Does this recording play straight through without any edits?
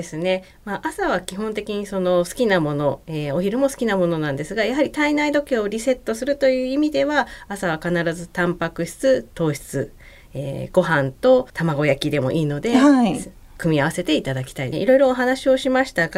no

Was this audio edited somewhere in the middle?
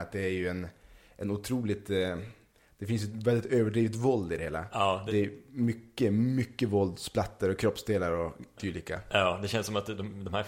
no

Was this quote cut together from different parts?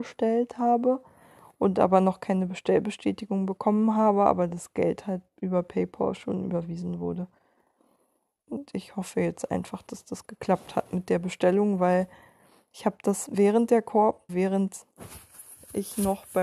yes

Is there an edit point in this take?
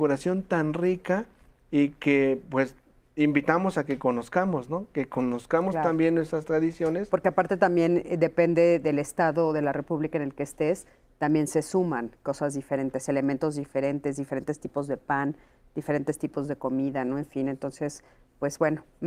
no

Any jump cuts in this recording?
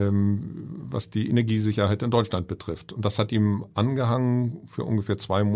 no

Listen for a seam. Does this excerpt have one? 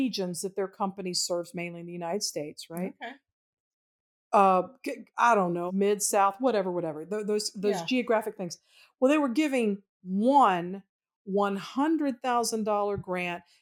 yes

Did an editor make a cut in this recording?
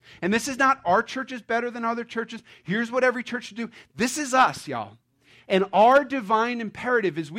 no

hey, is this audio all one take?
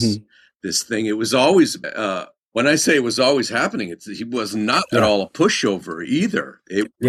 no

